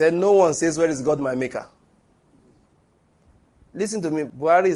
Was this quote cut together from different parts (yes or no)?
no